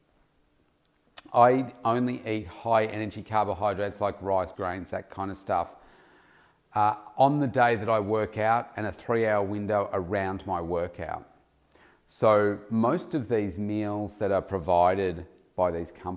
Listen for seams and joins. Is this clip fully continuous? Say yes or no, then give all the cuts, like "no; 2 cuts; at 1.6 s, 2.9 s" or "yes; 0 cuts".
no; 1 cut; at 4.5 s